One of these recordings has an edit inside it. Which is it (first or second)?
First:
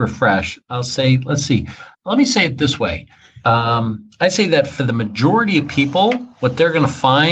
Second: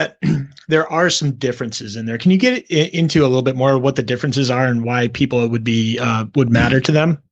first